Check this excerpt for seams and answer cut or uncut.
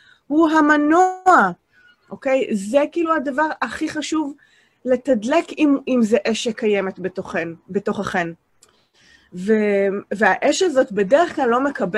uncut